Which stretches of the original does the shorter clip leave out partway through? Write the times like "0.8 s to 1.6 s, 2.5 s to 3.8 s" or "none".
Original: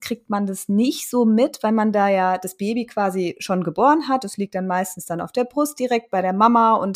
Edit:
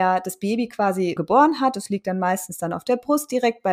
3.3 s to 3.6 s